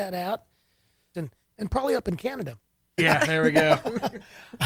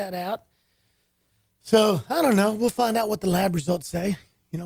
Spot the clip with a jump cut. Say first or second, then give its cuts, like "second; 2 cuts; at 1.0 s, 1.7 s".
first; 2 cuts; at 1.1 s, 3.0 s